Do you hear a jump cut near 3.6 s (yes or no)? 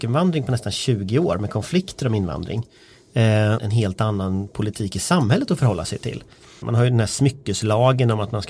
yes